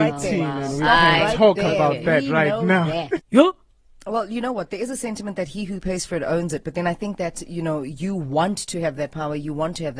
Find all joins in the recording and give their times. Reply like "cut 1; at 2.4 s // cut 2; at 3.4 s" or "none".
cut 1; at 3.2 s

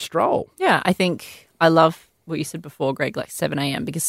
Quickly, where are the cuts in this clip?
none

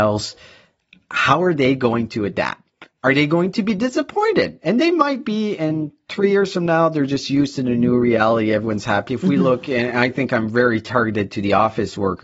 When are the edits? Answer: cut 1; at 9.1 s

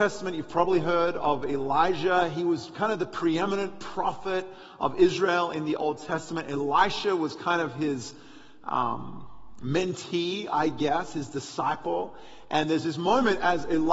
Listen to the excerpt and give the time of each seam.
none

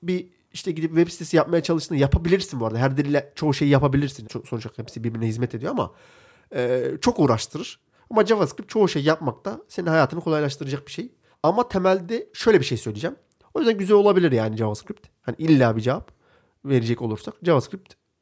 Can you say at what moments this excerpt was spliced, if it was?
cut 1; at 4.2 s // cut 2; at 11.3 s // cut 3; at 13.4 s

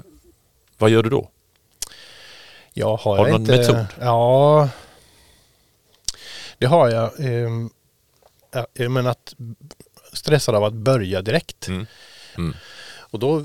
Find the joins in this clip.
cut 1; at 8.4 s // cut 2; at 12.4 s

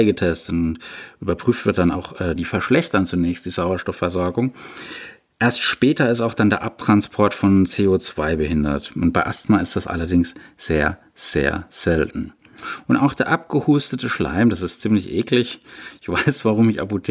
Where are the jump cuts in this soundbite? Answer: cut 1; at 2.4 s

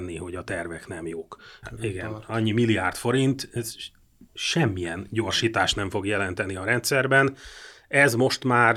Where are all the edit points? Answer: cut 1; at 1.6 s

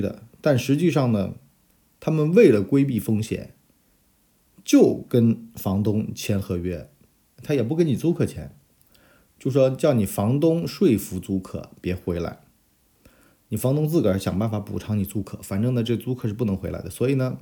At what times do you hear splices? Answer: none

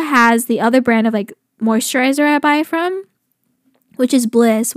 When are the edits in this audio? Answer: none

